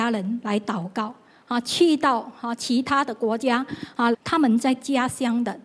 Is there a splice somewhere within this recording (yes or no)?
yes